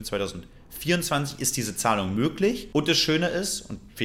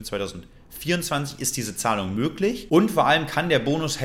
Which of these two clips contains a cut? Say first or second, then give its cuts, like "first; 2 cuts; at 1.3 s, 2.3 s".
second; 1 cut; at 2.7 s